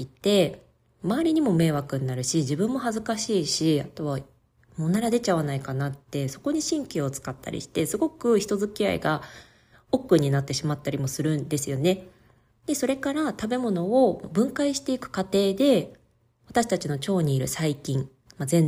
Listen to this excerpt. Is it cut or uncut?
cut